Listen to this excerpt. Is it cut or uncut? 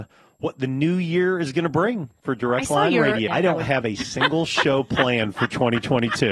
cut